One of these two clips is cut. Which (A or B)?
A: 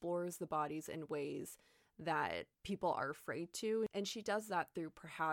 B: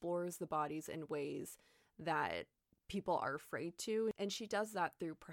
A